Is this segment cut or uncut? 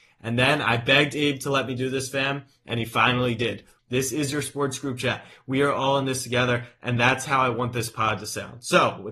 cut